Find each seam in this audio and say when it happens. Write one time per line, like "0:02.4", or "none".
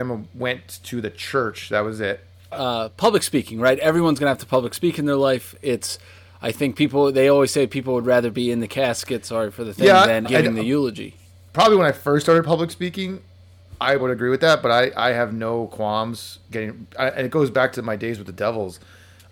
0:02.5
0:10.2
0:14.0